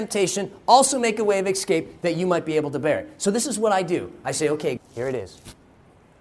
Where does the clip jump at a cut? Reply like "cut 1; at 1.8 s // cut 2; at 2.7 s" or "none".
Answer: cut 1; at 4.8 s